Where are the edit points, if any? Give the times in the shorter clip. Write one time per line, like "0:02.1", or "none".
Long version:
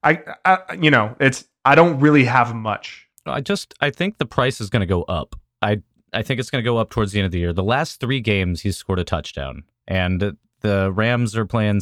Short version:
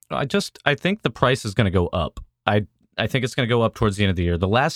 none